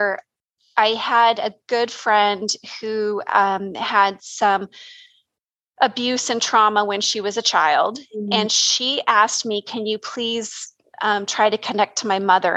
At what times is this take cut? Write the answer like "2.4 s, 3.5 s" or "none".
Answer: none